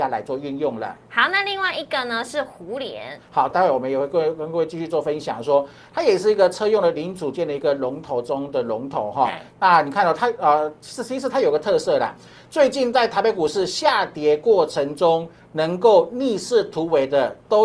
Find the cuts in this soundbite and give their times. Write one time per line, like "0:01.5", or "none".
0:03.5